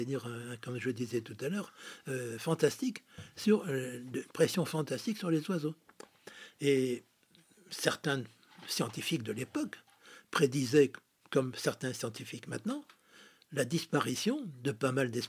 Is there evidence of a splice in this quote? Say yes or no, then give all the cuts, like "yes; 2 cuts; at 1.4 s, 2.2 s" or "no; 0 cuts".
no; 0 cuts